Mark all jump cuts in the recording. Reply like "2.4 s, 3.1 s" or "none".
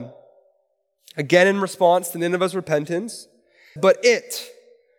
3.8 s